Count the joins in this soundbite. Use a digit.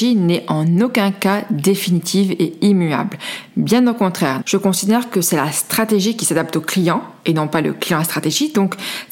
1